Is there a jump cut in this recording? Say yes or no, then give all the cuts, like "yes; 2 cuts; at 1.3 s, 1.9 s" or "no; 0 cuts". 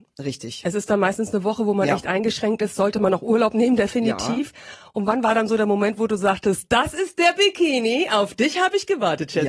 no; 0 cuts